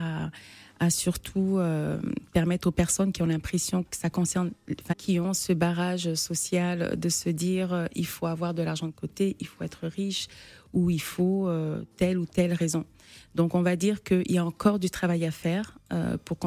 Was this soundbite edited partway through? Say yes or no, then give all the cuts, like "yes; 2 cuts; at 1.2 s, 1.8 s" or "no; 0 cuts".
yes; 1 cut; at 4.9 s